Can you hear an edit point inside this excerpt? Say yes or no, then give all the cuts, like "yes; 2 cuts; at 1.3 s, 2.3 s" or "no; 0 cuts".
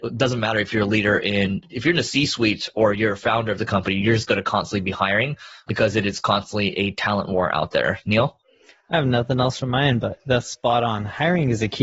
no; 0 cuts